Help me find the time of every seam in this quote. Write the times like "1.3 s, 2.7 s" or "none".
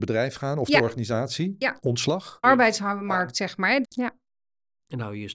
2.4 s, 3.8 s